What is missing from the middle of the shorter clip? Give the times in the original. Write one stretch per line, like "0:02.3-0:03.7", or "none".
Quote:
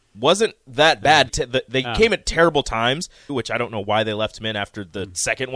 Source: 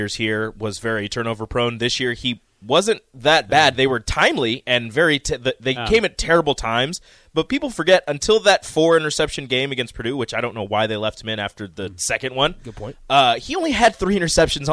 0:03.8-0:05.2
0:07.2-0:10.1